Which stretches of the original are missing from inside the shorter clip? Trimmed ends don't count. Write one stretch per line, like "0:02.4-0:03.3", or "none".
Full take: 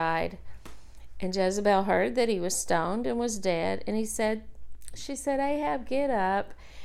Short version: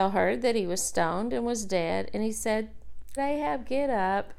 0:04.9-0:05.4